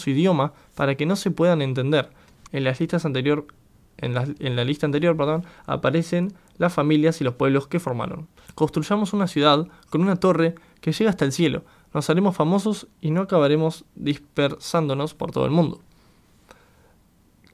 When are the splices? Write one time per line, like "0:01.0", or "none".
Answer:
0:02.5
0:08.5